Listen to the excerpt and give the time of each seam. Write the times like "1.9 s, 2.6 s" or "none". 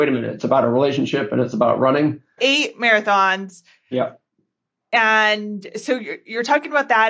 2.4 s